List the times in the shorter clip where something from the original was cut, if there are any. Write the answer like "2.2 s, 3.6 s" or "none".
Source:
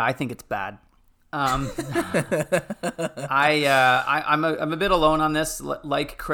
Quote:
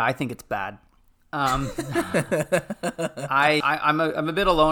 3.6 s